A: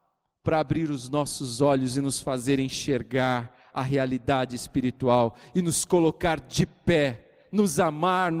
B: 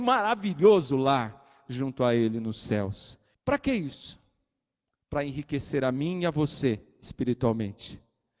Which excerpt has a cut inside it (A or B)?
B